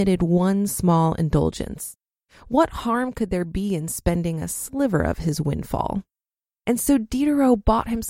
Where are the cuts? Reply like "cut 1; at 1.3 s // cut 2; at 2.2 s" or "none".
none